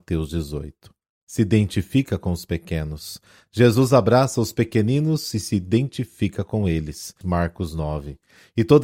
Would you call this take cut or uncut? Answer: cut